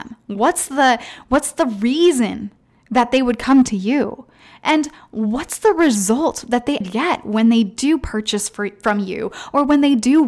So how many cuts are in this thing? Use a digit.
1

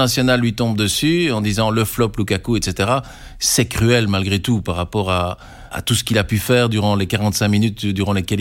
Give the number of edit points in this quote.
1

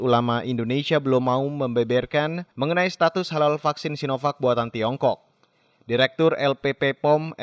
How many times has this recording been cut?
1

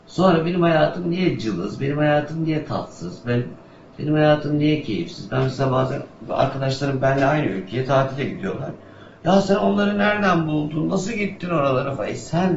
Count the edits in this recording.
0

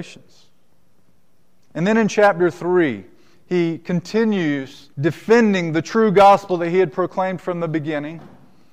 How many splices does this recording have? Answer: 2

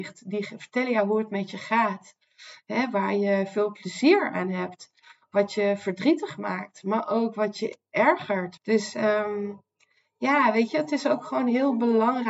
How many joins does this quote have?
1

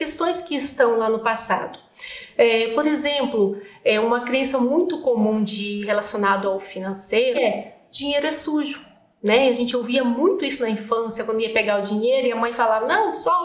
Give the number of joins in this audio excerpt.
1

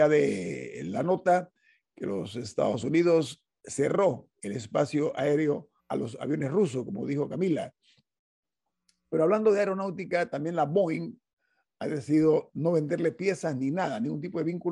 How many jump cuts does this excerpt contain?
1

